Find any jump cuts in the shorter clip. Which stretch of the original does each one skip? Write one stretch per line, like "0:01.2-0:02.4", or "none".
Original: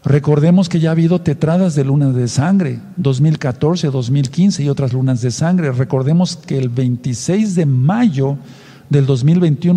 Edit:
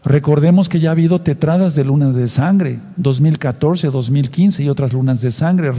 none